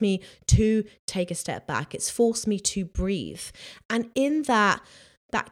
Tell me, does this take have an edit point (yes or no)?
no